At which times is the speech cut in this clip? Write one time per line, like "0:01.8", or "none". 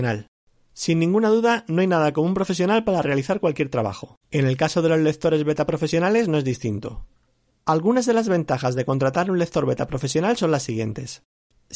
0:04.2